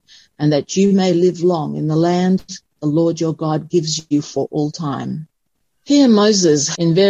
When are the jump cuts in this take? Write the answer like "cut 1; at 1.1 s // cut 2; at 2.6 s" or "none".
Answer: none